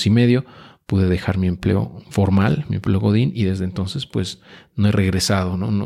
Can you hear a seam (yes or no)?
no